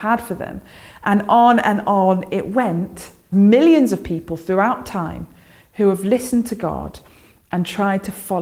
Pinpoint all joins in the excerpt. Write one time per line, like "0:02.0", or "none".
0:03.3